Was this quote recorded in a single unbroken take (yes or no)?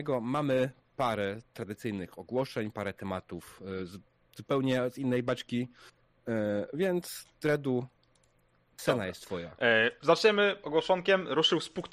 yes